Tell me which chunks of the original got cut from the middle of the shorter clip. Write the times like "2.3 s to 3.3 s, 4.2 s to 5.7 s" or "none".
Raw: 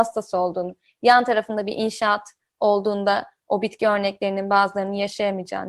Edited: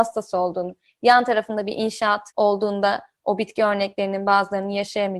2.3 s to 2.5 s